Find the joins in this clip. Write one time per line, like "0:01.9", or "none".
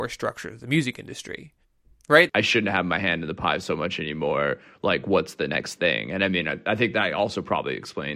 0:02.3